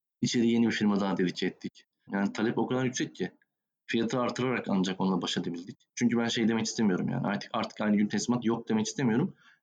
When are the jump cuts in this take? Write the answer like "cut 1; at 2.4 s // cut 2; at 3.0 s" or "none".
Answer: cut 1; at 2.1 s